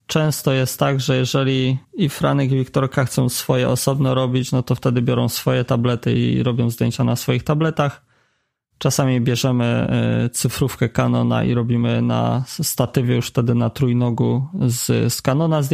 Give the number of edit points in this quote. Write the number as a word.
zero